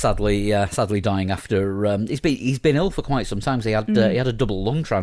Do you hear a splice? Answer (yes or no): no